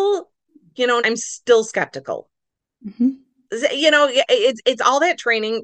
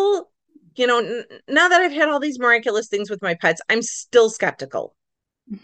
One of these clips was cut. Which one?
first; 1 cut; at 1.0 s

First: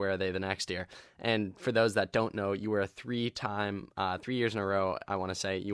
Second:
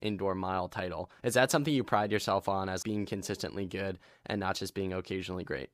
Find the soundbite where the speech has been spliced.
second; 2 cuts; at 1.2 s, 2.8 s

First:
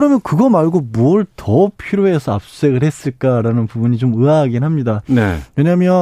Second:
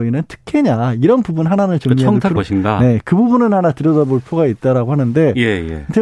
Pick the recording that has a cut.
second; 1 cut; at 2.4 s

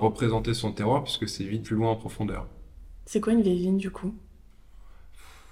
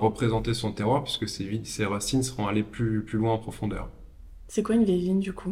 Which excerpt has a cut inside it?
first; 1 cut; at 1.6 s

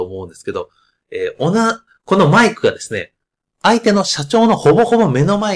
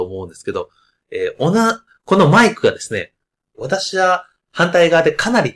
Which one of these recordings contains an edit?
second; 1 cut; at 3.5 s

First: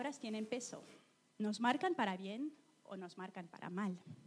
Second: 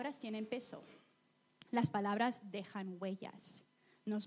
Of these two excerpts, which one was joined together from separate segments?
first; 1 cut; at 1.4 s

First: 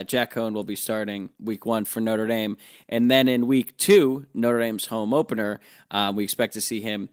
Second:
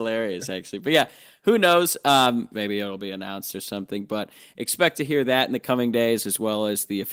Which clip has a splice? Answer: second; 1 cut; at 2.5 s

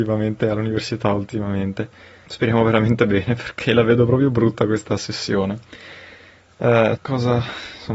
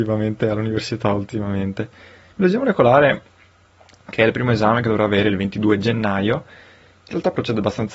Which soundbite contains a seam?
first; 2 cuts; at 2.3 s, 6.9 s

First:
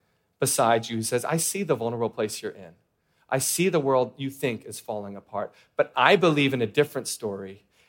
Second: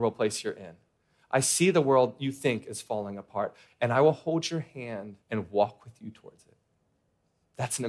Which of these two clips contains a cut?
second; 2 cuts; at 3.7 s, 5.2 s

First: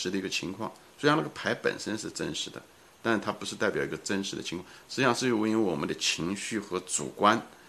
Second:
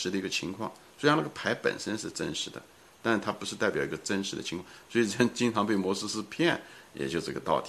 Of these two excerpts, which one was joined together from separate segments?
first; 1 cut; at 4.8 s

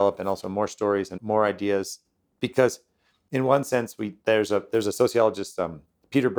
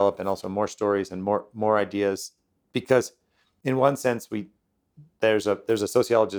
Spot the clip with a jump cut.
first; 2 cuts; at 1.2 s, 4.2 s

